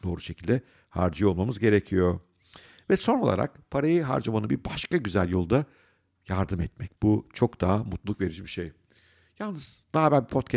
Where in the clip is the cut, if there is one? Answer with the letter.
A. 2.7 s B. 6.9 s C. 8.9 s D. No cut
B